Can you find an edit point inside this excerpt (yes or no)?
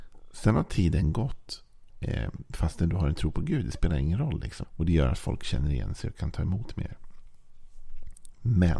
yes